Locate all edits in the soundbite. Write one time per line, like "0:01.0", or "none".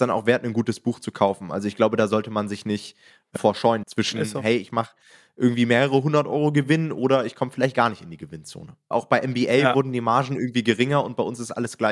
0:03.8
0:08.9